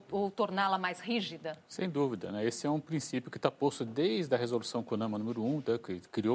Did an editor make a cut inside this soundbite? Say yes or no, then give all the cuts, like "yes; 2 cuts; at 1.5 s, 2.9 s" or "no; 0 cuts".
no; 0 cuts